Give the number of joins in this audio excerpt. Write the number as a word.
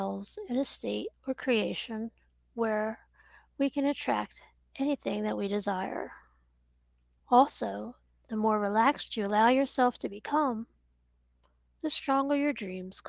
one